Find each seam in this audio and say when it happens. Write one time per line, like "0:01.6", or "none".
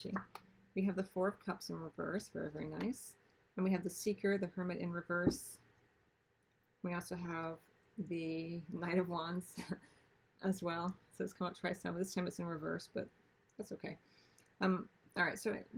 none